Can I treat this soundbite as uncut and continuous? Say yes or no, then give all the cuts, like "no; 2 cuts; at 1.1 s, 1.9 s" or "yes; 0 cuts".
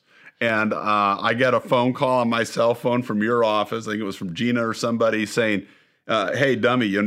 yes; 0 cuts